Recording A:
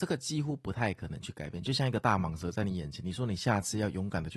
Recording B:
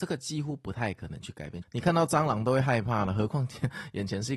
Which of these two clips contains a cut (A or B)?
B